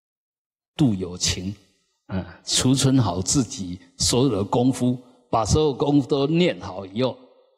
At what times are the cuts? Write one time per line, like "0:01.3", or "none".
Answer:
none